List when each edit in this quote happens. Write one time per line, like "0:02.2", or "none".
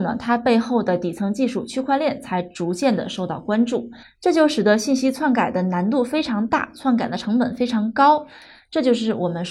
0:04.0